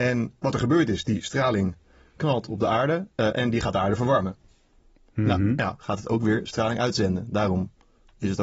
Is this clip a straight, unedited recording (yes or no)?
no